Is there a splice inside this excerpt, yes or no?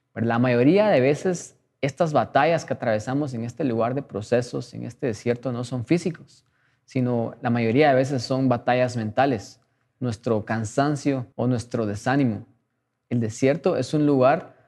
yes